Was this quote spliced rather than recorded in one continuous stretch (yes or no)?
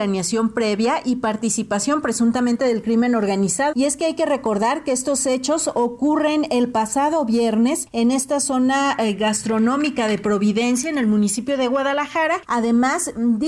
yes